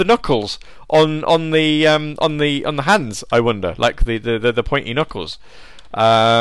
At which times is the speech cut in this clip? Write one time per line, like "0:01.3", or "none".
none